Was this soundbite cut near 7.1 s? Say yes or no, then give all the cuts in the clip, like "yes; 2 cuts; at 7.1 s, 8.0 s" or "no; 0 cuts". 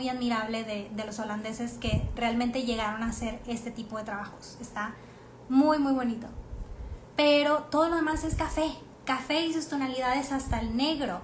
yes; 1 cut; at 7.1 s